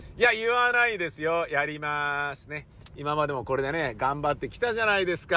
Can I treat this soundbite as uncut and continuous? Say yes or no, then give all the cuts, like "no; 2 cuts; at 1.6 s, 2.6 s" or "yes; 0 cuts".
yes; 0 cuts